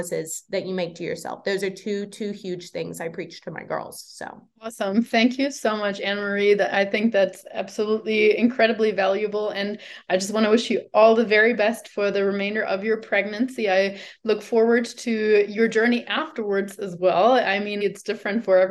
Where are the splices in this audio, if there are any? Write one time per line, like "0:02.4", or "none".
0:04.6
0:17.8